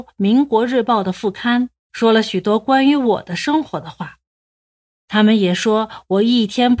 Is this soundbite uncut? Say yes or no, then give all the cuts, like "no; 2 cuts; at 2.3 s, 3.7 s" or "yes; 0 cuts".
no; 1 cut; at 1.8 s